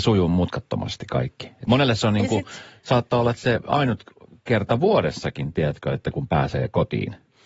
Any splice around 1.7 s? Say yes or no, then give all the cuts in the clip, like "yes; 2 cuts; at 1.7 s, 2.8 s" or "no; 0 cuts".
yes; 1 cut; at 1.7 s